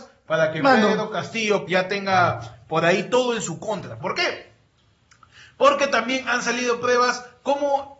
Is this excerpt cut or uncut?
cut